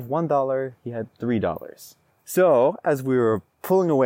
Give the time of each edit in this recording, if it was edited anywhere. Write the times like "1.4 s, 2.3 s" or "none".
2.1 s

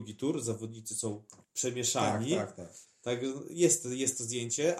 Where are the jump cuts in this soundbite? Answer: 1.4 s, 2.8 s

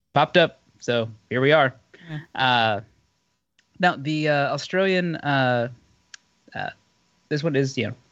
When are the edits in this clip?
none

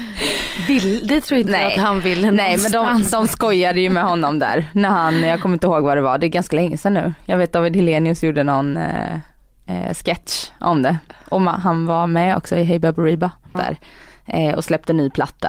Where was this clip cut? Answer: 13.5 s

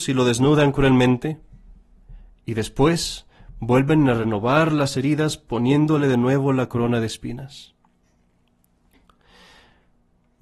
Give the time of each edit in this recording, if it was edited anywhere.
none

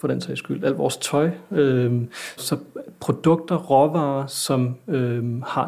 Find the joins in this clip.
2.4 s

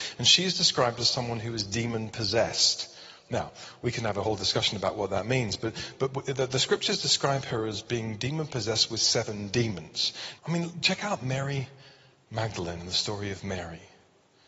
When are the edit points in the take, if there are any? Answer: 10.4 s

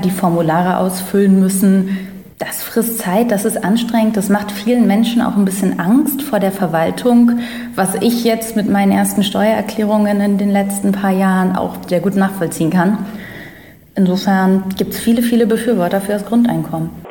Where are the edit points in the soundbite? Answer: none

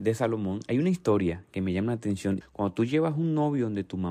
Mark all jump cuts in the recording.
2.4 s

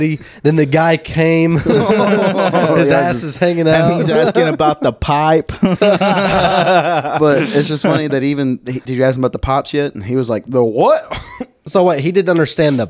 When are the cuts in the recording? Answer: 8.9 s

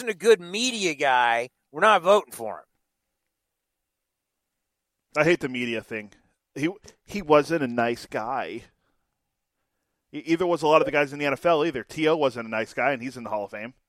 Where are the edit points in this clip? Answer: none

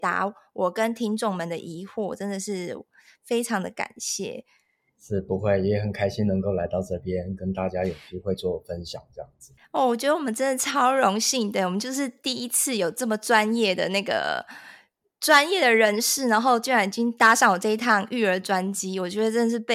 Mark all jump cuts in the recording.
9.6 s

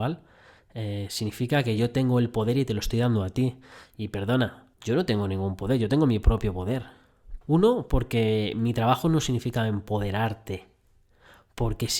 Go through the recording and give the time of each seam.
4.7 s, 7.4 s

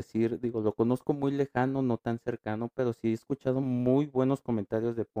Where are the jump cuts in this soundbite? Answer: none

